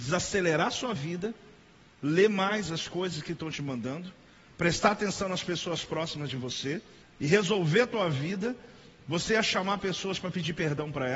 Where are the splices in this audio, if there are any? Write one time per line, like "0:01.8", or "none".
0:07.0